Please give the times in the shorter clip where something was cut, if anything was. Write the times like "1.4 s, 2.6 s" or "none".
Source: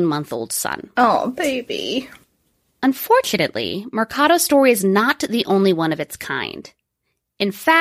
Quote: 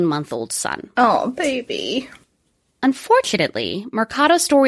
none